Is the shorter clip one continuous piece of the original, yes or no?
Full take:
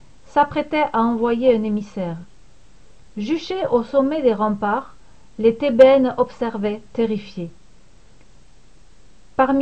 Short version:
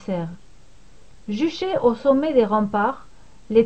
yes